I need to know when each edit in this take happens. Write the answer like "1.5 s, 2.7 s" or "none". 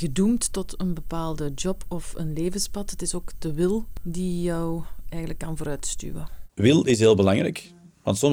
none